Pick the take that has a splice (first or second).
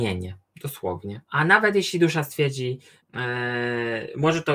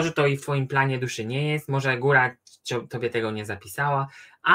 first